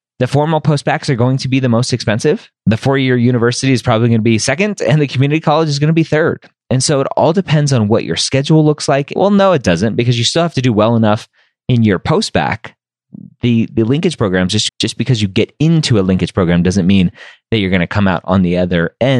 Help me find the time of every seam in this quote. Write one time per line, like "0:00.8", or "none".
0:02.6
0:09.2
0:14.7